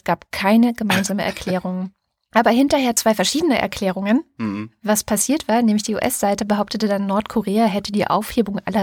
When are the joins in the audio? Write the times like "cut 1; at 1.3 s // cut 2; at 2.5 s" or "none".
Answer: none